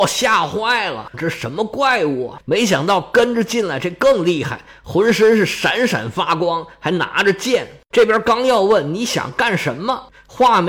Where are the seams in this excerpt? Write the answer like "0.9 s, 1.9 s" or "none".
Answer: 1.1 s